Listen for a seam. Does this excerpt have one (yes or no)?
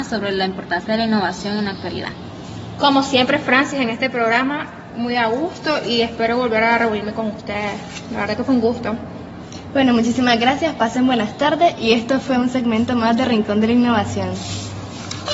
no